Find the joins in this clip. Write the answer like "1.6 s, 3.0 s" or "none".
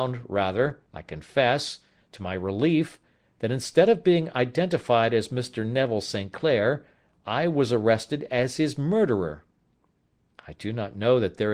none

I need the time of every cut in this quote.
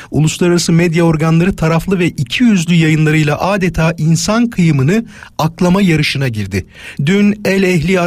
7.0 s

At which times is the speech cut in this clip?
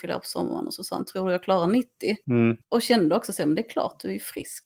2.6 s

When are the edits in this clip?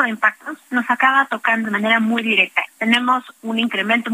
1.6 s, 2.7 s

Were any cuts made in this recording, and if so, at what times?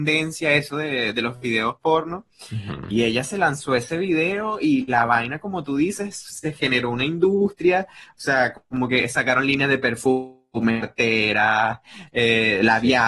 none

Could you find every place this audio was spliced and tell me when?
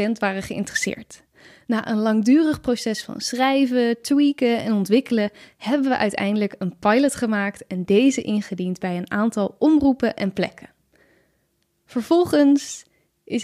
none

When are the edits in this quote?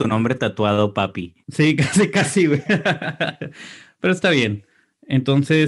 none

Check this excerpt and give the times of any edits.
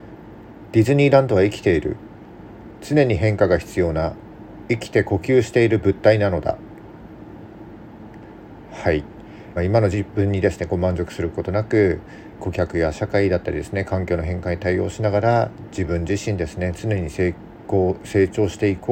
9.6 s, 12.4 s

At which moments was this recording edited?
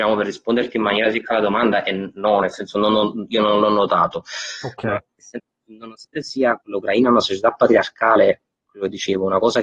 none

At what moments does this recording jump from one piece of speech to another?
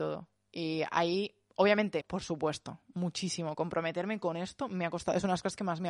2.0 s

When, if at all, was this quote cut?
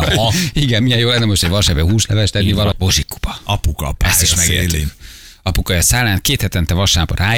2.7 s

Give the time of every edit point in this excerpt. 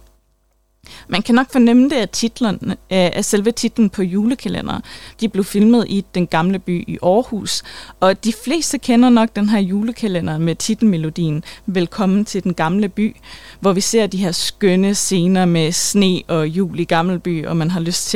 5.1 s

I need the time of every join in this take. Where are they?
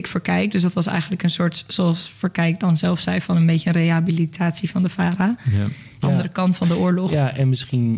6.0 s

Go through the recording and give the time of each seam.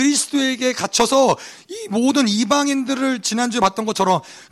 none

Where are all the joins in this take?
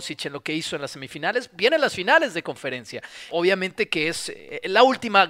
3.3 s

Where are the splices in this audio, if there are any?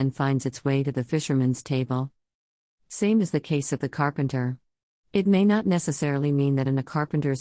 none

